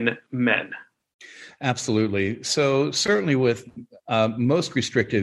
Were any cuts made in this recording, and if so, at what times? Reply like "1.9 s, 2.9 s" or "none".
none